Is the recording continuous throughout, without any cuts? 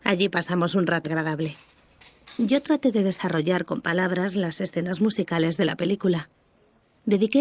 no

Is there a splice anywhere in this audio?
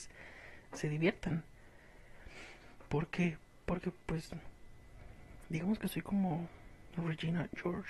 no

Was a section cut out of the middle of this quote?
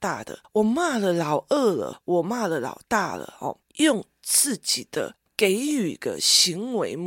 no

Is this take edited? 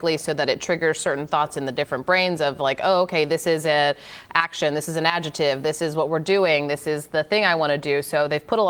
no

